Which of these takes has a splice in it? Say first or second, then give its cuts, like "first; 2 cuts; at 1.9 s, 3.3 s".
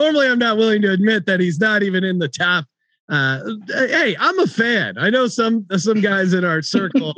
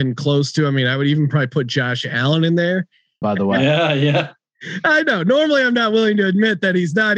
second; 1 cut; at 3.2 s